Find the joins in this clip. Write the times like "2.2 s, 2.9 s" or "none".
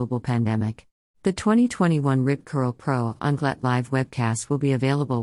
1.0 s